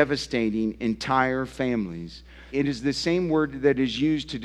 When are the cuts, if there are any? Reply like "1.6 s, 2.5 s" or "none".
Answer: 2.5 s